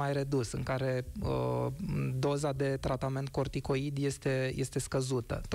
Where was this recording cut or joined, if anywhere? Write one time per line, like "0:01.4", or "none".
none